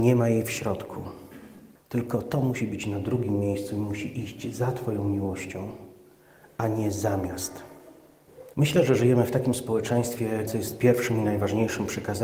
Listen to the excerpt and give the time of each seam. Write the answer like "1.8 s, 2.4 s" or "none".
1.8 s, 8.5 s, 10.5 s